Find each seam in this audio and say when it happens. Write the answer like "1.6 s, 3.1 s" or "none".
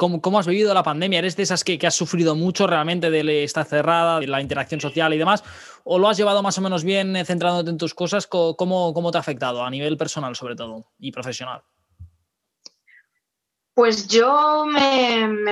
4.2 s